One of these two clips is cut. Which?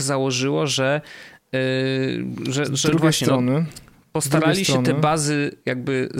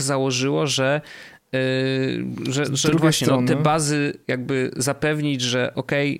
second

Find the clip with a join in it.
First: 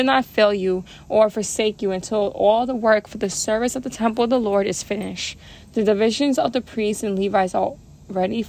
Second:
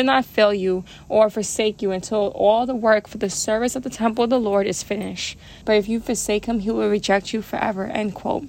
second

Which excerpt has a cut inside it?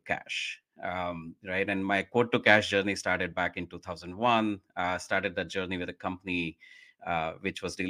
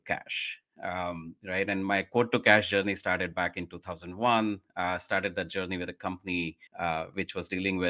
second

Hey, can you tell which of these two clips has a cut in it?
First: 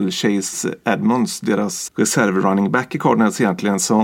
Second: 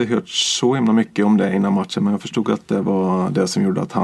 first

